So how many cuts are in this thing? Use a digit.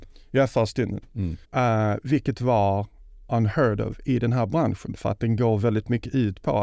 1